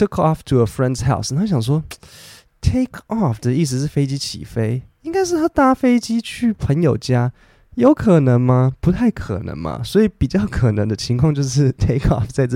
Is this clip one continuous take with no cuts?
yes; 0 cuts

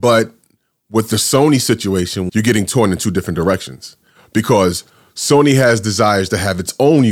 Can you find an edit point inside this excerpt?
yes; 1 cut; at 2.3 s

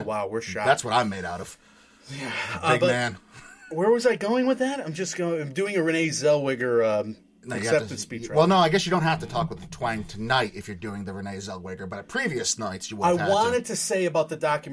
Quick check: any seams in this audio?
no; 0 cuts

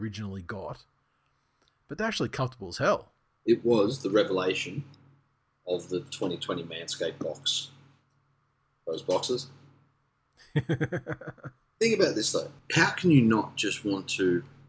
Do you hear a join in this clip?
no; 0 cuts

